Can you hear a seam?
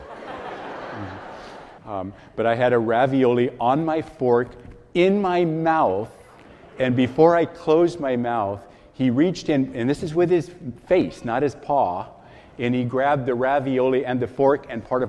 yes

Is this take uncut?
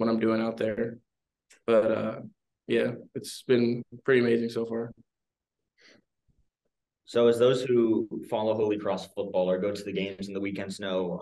yes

